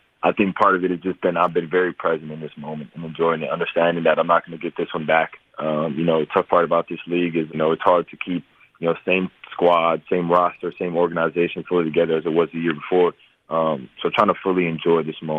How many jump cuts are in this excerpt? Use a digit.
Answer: 1